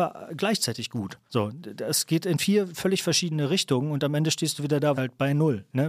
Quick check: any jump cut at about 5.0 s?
yes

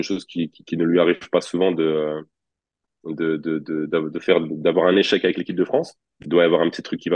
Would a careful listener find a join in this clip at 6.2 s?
yes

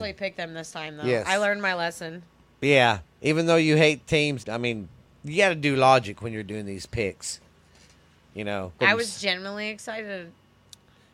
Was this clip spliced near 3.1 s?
no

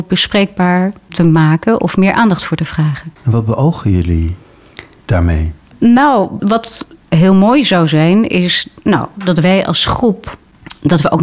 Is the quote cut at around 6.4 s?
yes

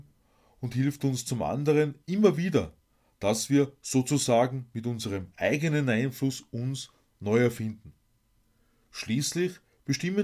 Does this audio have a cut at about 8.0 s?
no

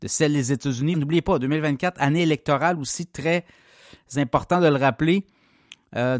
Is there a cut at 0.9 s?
yes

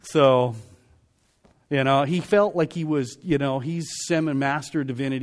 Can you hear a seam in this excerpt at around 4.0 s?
no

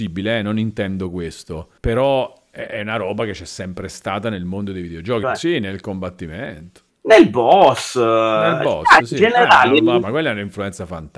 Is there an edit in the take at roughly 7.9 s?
no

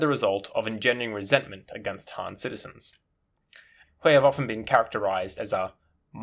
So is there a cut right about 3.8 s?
yes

